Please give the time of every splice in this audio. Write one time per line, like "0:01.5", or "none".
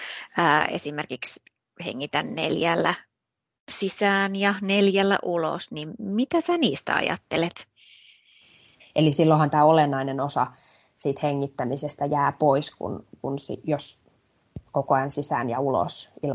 0:08.8